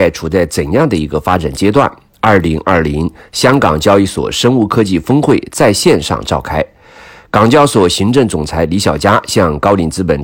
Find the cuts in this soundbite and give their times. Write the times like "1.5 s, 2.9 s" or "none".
none